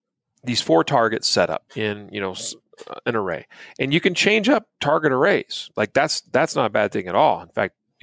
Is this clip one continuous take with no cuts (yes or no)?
no